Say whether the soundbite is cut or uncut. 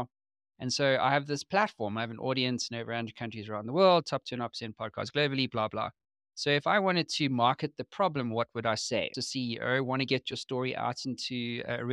cut